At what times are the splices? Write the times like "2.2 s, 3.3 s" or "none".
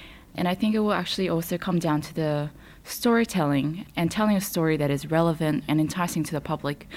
5.7 s